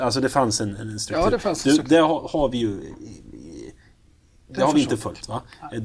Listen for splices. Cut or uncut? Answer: uncut